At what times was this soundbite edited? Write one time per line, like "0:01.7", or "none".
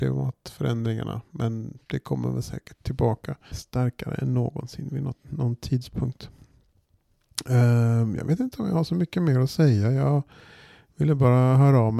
0:03.5

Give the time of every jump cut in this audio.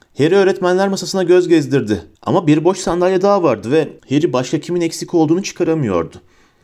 0:02.2
0:04.0

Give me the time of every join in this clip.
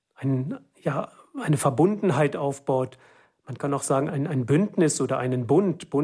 0:04.1

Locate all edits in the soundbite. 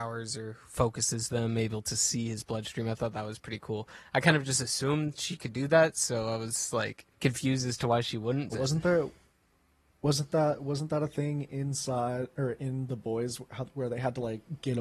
0:07.1
0:08.5

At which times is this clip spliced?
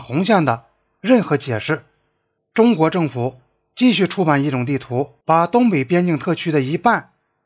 0:02.4
0:05.2

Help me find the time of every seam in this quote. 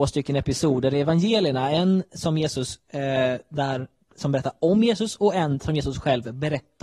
none

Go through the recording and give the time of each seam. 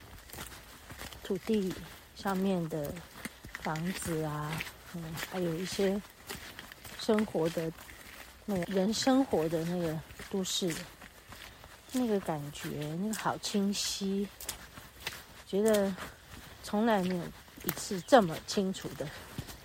0:08.6

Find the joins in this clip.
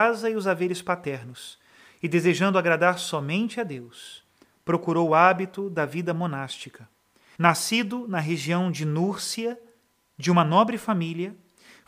0:07.3

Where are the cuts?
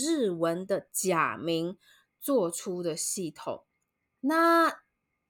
0:04.2

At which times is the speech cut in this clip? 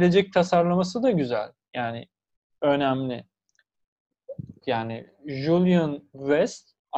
0:04.6

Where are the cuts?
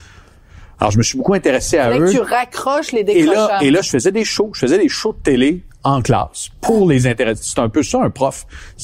none

